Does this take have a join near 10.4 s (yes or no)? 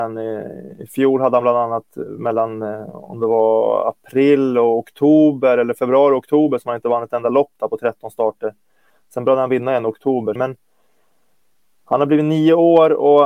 yes